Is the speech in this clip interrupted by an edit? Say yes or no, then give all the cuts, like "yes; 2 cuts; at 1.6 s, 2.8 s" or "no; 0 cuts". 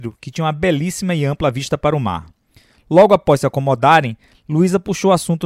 no; 0 cuts